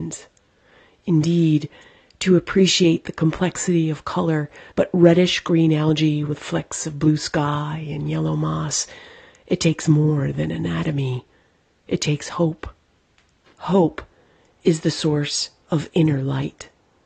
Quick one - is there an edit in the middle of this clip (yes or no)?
yes